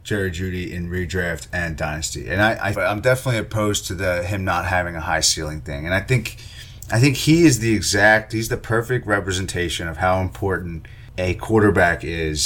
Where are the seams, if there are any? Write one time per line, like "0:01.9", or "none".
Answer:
0:02.7